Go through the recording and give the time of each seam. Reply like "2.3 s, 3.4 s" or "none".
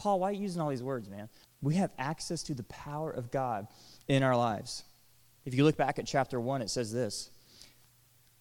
1.4 s, 5.4 s